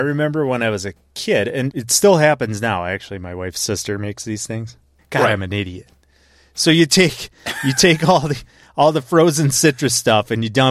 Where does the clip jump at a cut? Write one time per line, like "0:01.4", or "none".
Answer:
0:01.7
0:05.0